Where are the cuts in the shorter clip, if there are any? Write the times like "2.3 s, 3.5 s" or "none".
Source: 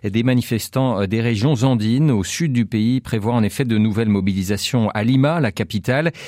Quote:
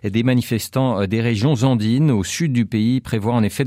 none